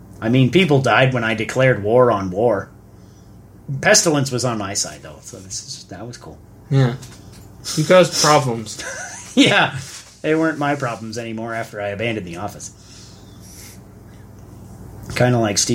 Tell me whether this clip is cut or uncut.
uncut